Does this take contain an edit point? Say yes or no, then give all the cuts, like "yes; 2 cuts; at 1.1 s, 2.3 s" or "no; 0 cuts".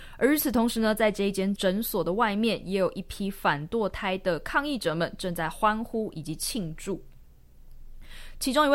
yes; 1 cut; at 1.6 s